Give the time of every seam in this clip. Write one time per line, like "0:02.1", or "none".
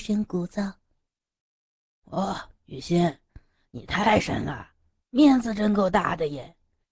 none